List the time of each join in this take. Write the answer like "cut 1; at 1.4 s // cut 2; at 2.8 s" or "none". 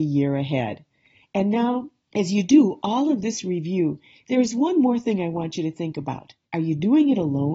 cut 1; at 6.4 s